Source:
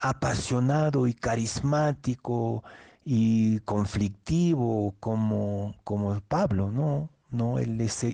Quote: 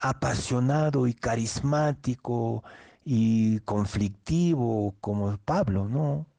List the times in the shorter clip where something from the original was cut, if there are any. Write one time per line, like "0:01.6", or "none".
0:05.0